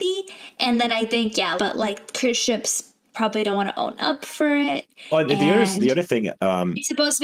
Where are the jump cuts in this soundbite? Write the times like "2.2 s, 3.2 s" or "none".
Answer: 1.6 s